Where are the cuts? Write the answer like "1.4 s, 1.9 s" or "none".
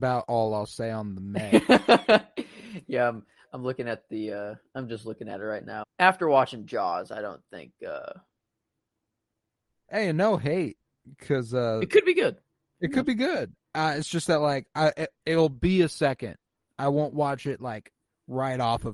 5.8 s